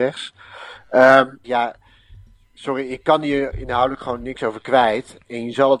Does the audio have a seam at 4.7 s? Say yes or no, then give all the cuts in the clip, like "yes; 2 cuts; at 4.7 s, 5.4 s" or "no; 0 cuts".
no; 1 cut; at 1.4 s